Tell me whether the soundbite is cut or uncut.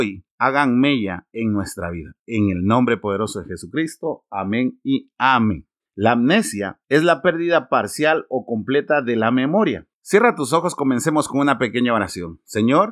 cut